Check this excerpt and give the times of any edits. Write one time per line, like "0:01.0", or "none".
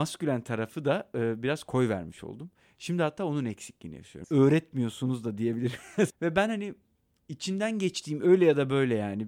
0:04.2
0:06.1